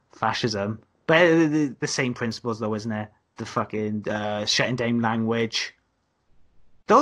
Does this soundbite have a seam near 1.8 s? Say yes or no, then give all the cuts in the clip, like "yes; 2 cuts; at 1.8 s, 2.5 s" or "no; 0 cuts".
no; 0 cuts